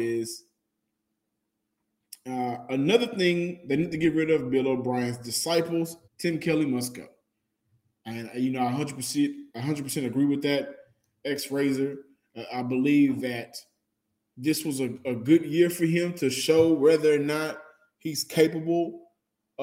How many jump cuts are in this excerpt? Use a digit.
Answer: 1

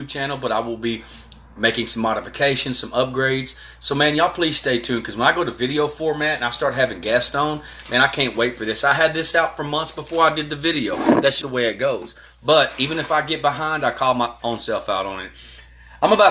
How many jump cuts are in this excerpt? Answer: 1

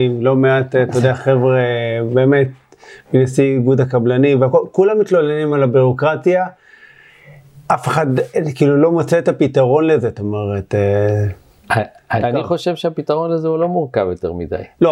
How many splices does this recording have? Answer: 1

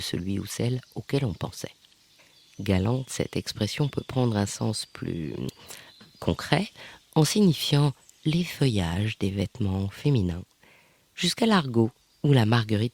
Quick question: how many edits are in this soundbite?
0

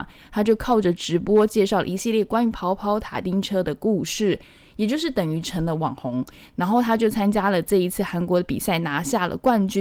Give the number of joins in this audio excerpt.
0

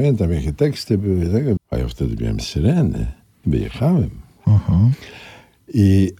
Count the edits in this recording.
1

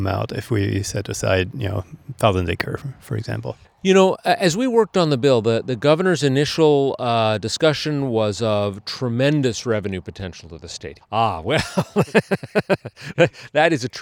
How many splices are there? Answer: 1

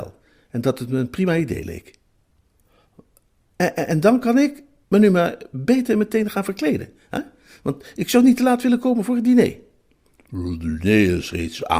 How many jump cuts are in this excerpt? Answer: 1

